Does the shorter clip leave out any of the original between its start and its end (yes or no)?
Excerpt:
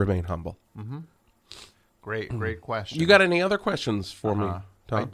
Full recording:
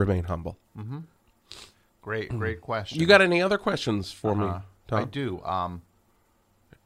no